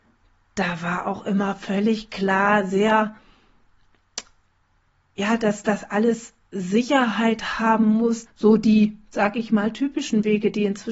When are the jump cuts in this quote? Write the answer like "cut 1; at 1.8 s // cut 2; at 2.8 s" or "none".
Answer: cut 1; at 8.3 s